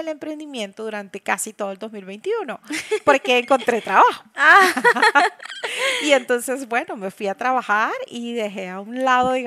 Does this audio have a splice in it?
no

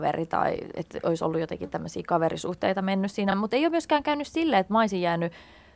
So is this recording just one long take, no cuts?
yes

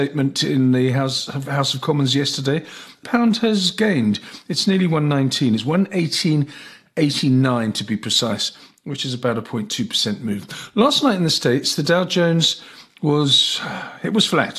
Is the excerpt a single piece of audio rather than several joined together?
yes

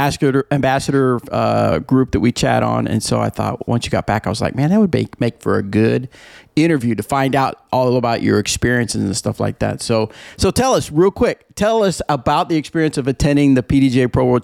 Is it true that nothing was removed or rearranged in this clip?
no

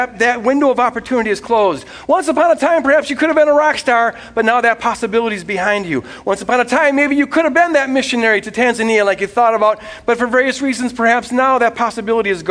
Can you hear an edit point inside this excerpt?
no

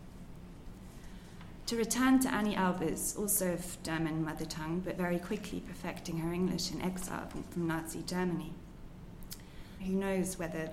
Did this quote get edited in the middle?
yes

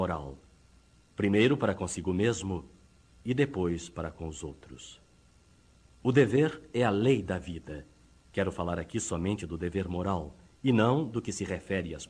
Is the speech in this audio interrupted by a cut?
yes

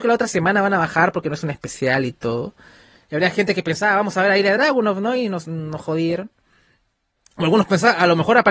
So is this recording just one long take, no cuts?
yes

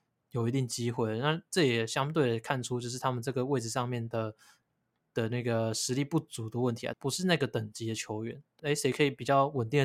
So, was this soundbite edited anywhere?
yes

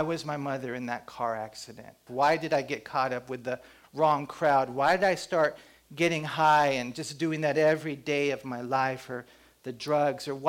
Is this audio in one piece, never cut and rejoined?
no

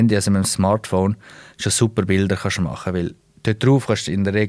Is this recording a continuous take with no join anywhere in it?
yes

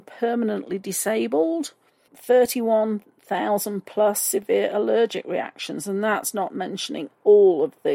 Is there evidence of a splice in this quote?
yes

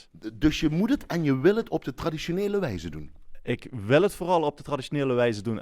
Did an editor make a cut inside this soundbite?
no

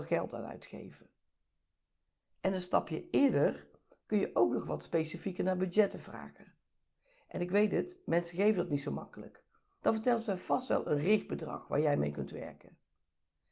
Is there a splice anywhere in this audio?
yes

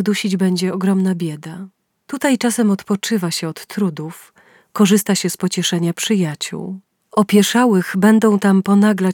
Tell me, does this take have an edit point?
yes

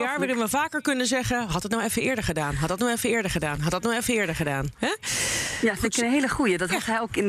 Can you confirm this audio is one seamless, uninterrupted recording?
yes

